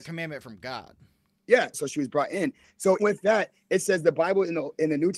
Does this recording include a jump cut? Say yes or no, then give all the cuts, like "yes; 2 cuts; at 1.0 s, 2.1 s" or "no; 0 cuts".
yes; 2 cuts; at 1.7 s, 3.0 s